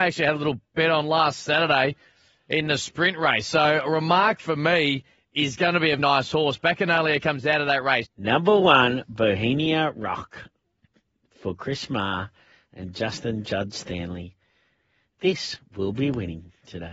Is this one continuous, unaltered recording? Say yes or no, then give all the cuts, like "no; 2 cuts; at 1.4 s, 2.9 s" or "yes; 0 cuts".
no; 2 cuts; at 6.0 s, 8.0 s